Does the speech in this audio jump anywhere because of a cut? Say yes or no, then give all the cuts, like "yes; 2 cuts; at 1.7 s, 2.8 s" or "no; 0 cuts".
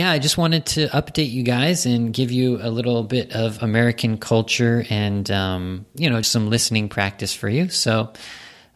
yes; 1 cut; at 6.2 s